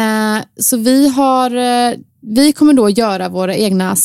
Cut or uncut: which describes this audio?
cut